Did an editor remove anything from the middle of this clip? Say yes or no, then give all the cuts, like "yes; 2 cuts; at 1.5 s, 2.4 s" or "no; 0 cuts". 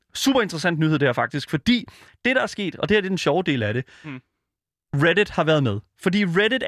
no; 0 cuts